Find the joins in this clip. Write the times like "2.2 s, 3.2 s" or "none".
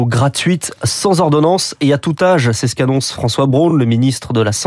none